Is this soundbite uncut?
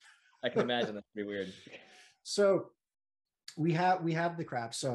yes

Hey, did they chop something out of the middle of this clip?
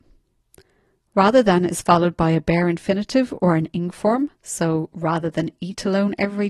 yes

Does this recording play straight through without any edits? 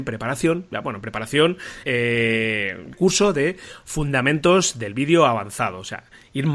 no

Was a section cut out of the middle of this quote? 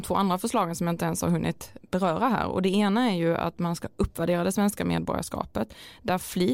yes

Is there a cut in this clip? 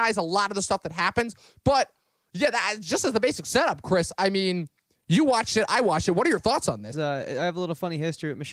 yes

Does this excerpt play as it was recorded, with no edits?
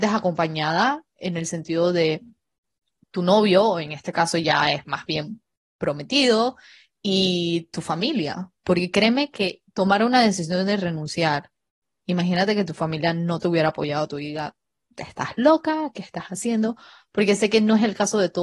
yes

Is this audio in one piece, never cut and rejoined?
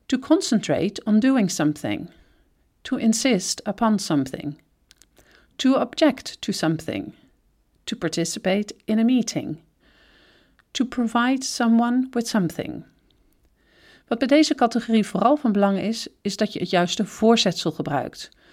yes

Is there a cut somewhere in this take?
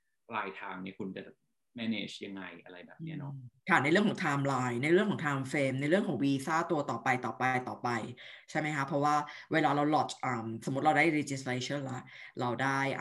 yes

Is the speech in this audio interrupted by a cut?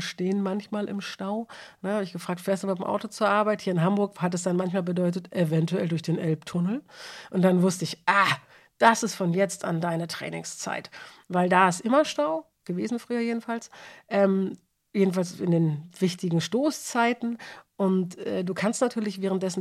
no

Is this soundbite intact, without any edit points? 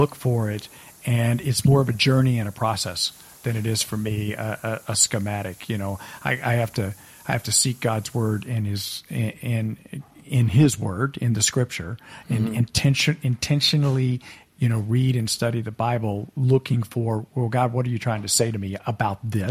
yes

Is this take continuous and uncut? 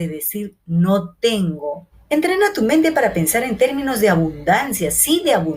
no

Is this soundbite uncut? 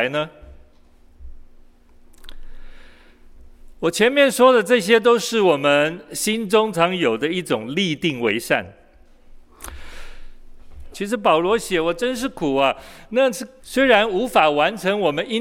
no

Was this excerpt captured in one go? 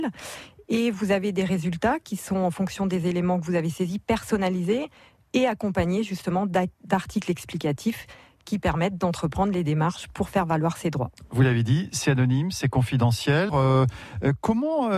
no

